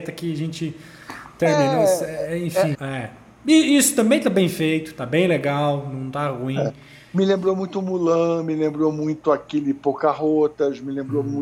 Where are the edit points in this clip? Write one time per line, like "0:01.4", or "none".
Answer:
0:02.7